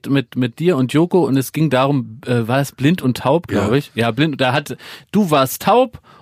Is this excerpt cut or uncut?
uncut